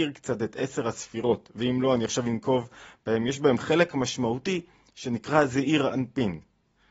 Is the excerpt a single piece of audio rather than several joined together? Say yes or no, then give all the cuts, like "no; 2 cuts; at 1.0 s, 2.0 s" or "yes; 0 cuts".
yes; 0 cuts